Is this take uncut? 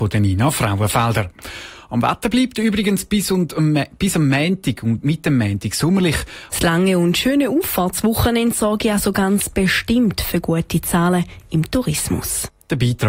no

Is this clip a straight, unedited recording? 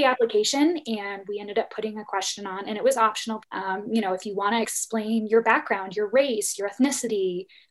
no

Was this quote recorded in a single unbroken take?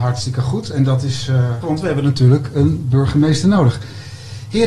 no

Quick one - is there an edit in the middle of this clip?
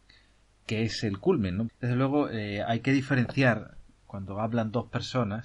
yes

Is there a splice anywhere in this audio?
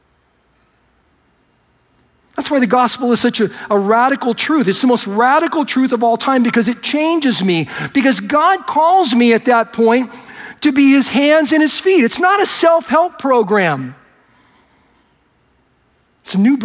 no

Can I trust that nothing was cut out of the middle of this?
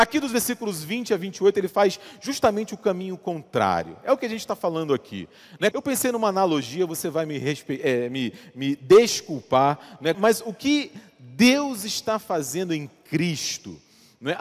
no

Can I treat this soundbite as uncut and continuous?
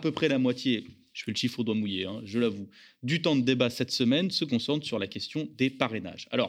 yes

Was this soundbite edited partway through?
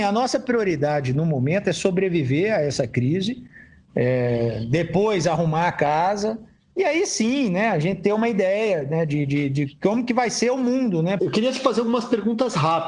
yes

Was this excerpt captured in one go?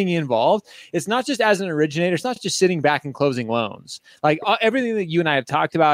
yes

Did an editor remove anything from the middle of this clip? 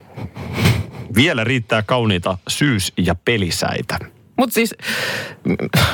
yes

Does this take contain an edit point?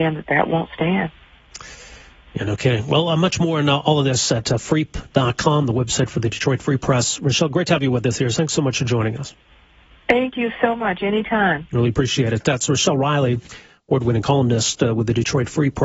no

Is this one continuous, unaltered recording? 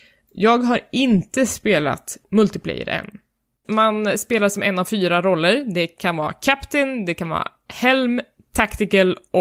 no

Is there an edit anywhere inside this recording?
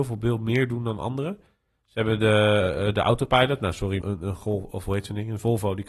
yes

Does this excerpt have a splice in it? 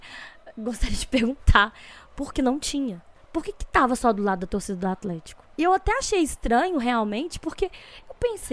yes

